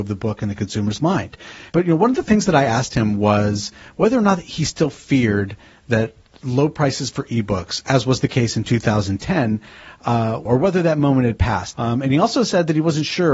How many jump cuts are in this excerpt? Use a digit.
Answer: 3